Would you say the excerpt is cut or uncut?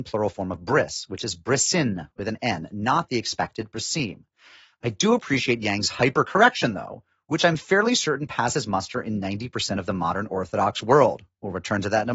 uncut